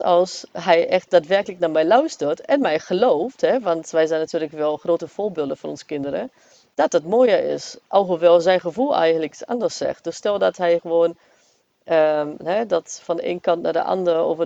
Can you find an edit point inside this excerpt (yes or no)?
no